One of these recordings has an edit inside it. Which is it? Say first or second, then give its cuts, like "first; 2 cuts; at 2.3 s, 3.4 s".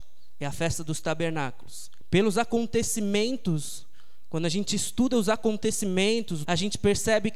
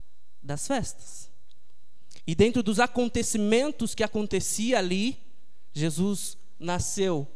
first; 2 cuts; at 2.0 s, 6.5 s